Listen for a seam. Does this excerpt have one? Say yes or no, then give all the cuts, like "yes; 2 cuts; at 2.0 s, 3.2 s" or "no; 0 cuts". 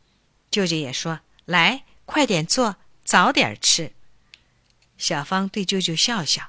no; 0 cuts